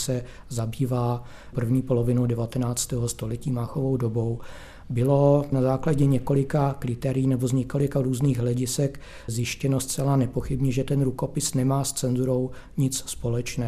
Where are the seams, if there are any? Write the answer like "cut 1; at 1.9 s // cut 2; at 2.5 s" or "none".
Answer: none